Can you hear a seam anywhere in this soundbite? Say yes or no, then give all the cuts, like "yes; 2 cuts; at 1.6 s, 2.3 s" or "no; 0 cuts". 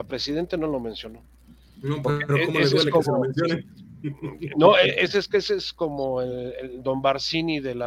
no; 0 cuts